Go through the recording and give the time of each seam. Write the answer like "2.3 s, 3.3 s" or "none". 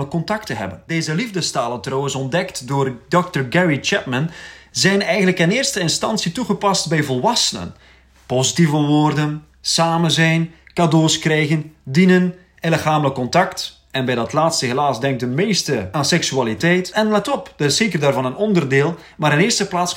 none